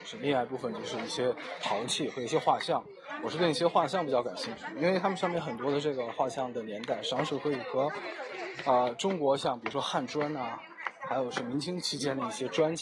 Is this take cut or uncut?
cut